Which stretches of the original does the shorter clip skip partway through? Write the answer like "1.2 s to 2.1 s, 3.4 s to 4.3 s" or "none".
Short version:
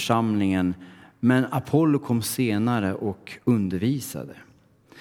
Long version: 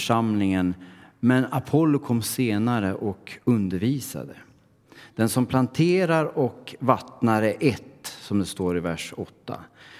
none

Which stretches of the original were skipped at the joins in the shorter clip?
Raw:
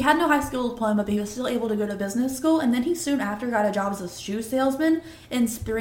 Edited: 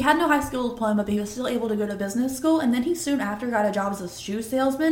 none

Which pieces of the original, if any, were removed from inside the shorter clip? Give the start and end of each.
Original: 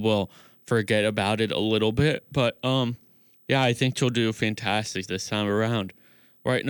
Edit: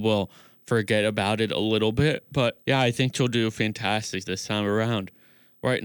2.6 s to 3.4 s

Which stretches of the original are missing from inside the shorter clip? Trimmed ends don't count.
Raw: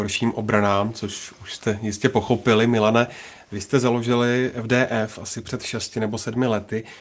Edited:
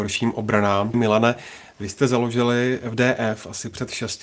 0.9 s to 2.7 s

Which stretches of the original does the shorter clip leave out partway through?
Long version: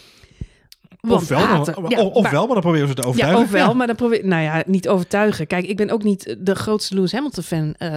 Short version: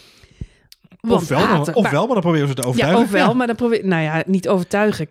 1.7 s to 2.1 s

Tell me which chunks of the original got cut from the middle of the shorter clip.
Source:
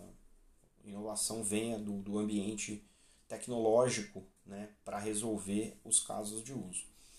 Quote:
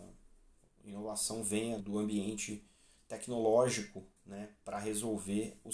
1.8 s to 2.0 s

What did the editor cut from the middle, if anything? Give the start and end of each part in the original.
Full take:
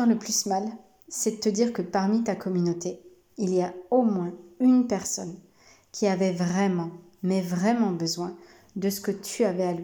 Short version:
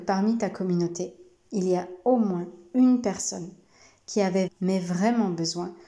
6.3 s to 7.1 s

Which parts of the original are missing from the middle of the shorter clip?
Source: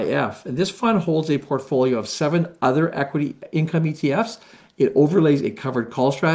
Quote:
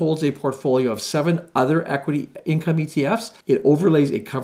4.5 s to 4.7 s

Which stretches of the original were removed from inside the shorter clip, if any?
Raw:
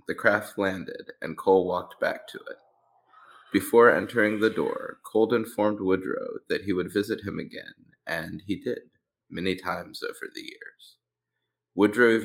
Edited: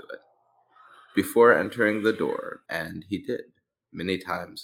5.0 s to 8.0 s

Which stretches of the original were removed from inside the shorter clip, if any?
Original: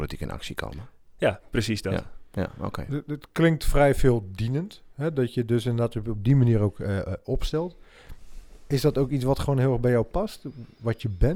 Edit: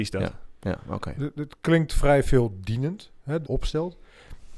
5.1 s to 7.2 s

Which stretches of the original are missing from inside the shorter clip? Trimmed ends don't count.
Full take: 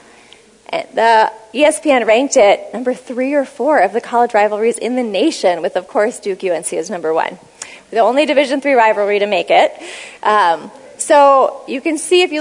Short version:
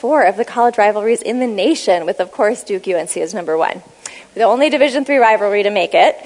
none

